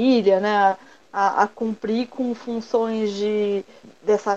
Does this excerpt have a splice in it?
no; 0 cuts

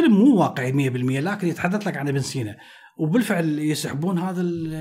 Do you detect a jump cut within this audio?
no; 0 cuts

